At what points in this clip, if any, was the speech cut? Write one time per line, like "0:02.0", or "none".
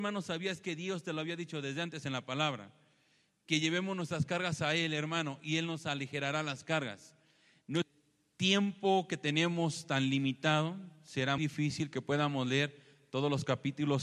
0:11.4